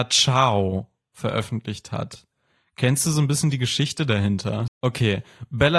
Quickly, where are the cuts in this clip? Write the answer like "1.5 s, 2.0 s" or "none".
4.7 s